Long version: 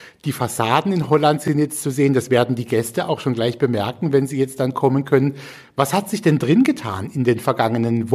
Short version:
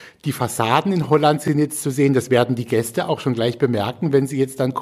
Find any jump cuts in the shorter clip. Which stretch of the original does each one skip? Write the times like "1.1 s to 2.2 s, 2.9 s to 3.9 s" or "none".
none